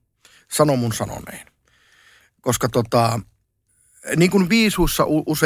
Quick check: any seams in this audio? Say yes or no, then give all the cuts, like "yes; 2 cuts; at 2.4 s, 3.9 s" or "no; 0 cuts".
no; 0 cuts